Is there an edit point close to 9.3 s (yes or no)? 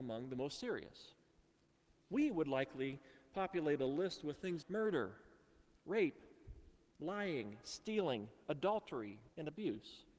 yes